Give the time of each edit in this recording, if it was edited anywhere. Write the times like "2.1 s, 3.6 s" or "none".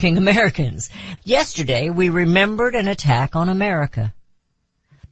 1.2 s